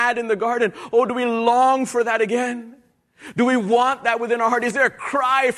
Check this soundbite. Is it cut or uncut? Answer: uncut